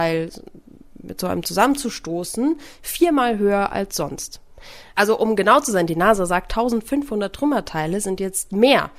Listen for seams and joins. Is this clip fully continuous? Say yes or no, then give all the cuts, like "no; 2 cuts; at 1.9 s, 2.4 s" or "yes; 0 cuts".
no; 1 cut; at 4.9 s